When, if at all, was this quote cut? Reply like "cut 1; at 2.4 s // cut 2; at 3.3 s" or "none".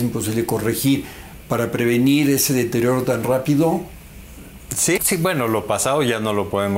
cut 1; at 5.0 s